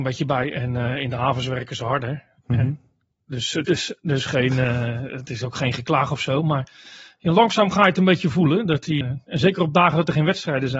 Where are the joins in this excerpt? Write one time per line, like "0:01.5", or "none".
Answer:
0:09.0